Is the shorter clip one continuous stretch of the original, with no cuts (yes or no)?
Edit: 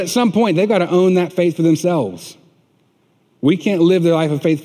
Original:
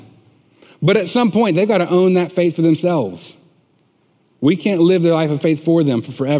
yes